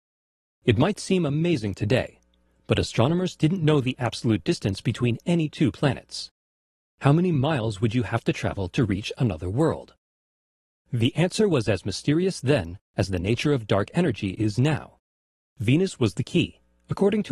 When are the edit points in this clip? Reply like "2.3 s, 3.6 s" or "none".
none